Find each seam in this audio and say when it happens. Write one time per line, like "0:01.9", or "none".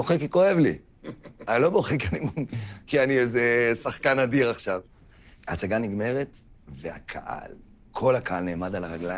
none